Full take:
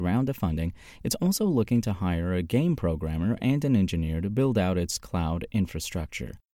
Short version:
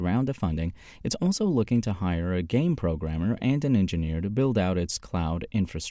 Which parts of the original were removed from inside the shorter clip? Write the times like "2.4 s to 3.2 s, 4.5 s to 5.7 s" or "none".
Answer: none